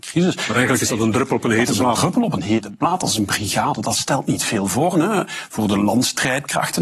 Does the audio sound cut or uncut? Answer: cut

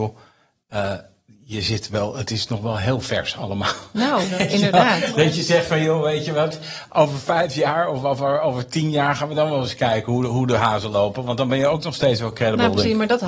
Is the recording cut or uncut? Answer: uncut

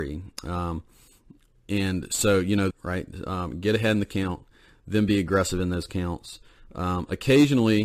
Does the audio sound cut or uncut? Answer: cut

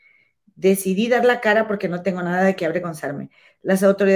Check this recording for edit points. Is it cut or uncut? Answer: uncut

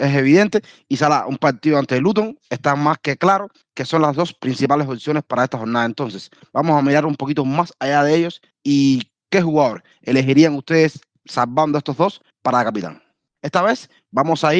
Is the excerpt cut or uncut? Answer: cut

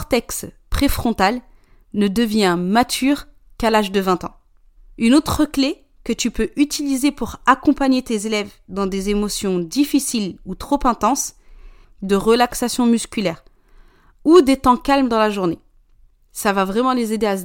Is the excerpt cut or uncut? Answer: cut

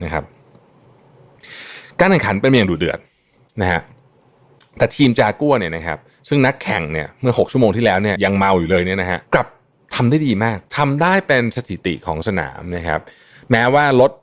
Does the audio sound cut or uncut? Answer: cut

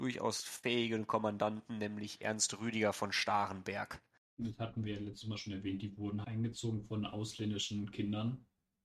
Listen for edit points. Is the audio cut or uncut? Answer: cut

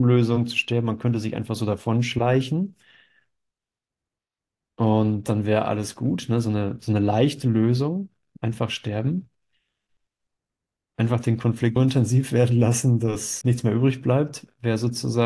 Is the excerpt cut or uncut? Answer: cut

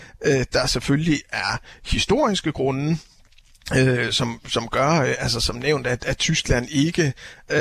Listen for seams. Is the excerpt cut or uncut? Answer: uncut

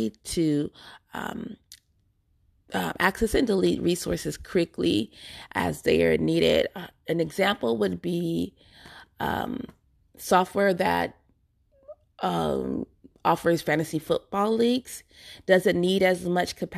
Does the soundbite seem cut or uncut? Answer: uncut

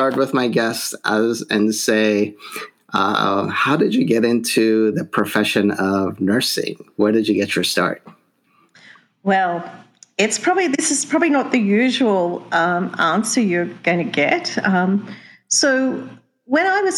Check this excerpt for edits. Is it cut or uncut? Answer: uncut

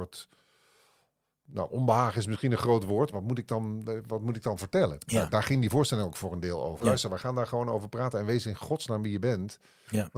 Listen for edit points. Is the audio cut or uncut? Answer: cut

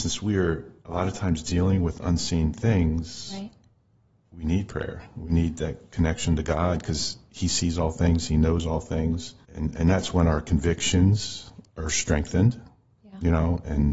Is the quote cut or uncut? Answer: uncut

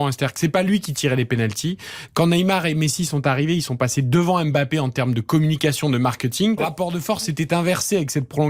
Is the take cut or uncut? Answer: cut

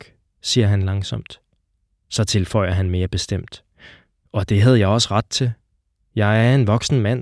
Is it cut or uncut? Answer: uncut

